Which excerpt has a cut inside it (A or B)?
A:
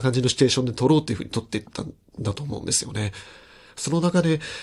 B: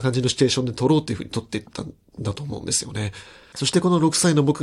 B